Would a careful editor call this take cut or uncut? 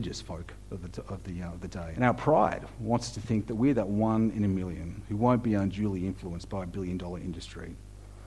cut